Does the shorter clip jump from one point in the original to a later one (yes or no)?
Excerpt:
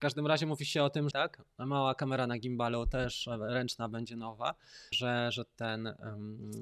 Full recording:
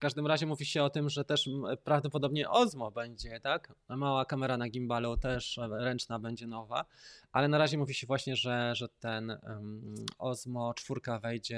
yes